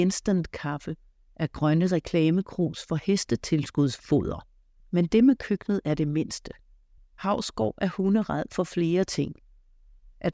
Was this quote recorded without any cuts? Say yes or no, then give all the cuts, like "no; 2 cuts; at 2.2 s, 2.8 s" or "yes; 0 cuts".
no; 2 cuts; at 4.8 s, 7.0 s